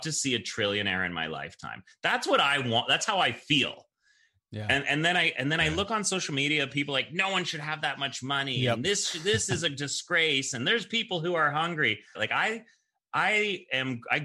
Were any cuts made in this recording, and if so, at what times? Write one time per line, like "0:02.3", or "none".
0:12.2